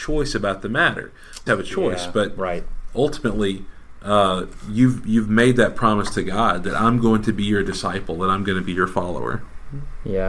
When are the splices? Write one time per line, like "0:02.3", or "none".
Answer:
0:01.5